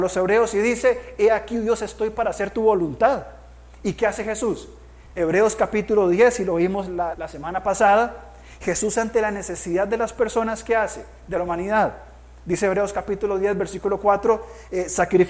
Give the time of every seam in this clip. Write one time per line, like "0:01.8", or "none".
0:05.1
0:07.1